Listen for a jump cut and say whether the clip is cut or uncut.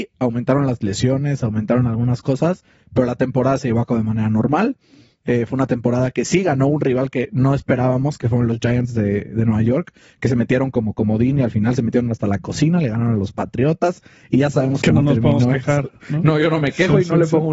uncut